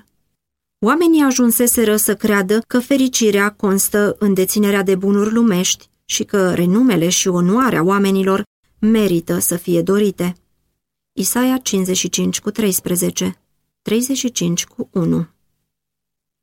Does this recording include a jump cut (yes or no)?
yes